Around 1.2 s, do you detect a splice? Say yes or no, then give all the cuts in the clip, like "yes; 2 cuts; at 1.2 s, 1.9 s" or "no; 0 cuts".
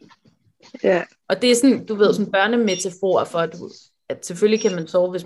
yes; 1 cut; at 1.2 s